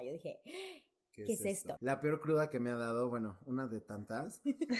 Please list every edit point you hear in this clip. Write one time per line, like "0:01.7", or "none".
0:01.8